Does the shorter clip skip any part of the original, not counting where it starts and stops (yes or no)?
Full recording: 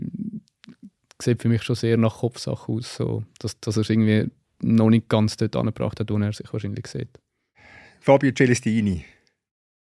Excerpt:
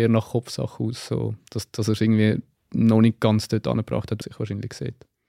yes